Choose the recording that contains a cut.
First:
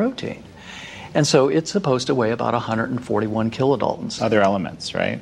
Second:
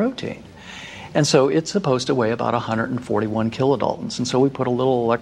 first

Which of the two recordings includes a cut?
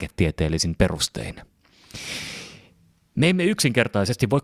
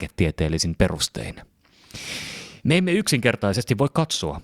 second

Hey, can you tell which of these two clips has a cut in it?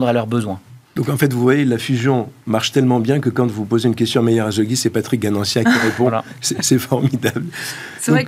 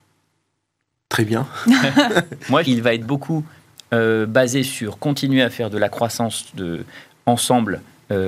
second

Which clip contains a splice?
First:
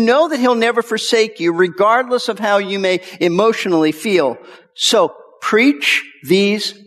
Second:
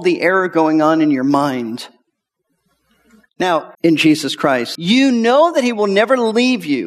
second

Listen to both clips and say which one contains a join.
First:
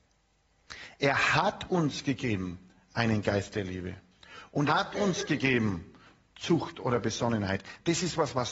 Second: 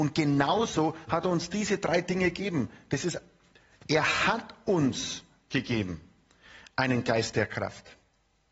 first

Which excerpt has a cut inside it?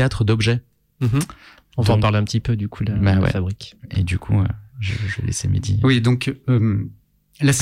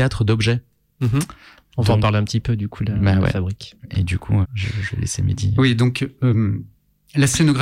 second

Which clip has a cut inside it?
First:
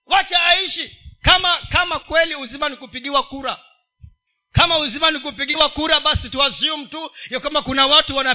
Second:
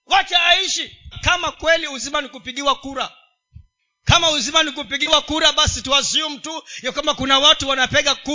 second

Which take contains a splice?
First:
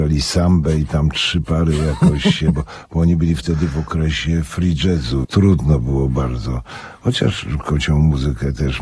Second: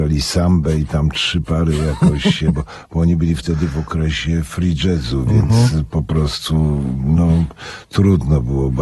first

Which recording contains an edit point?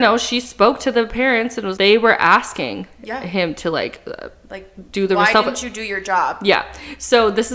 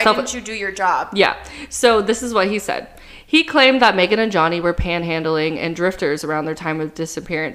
first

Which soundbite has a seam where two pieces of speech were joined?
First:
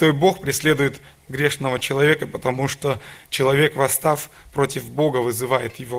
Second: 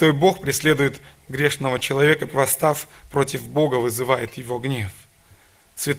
second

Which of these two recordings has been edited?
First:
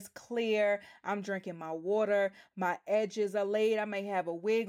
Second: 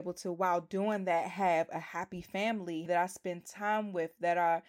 second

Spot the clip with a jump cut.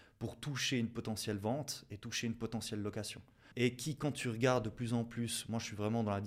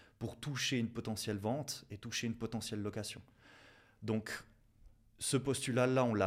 first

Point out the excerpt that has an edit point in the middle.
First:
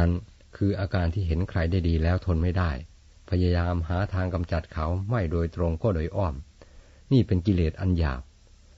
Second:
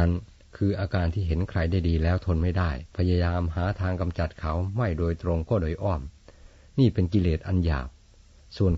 second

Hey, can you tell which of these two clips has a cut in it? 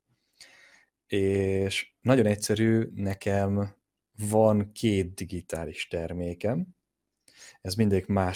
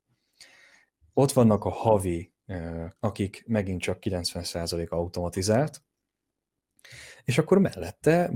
second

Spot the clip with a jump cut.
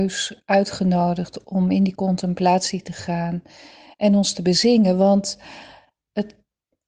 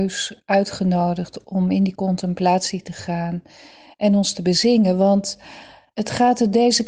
second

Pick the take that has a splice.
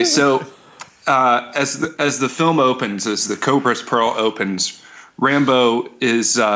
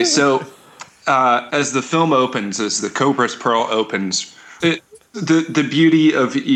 second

